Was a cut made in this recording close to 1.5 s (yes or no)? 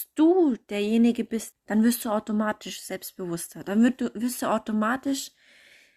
yes